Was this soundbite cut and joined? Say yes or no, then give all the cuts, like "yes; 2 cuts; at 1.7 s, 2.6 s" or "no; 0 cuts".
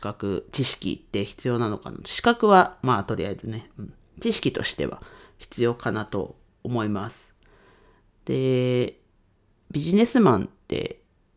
no; 0 cuts